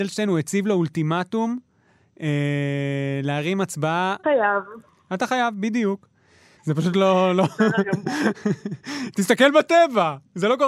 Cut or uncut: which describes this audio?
cut